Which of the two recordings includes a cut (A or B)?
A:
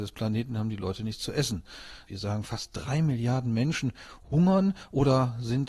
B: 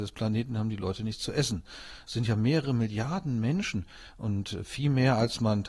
A